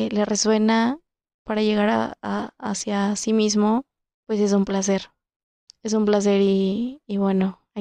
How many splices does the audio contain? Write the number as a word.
zero